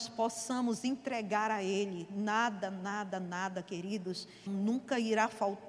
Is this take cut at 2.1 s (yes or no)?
no